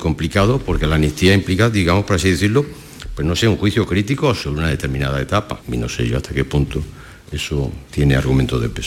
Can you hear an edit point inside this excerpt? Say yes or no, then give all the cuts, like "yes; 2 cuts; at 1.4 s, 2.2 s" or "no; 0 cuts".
no; 0 cuts